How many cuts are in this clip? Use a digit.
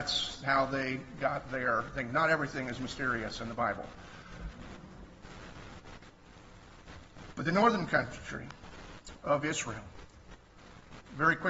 0